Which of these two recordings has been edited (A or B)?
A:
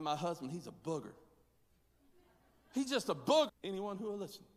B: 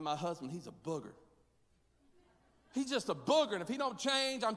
A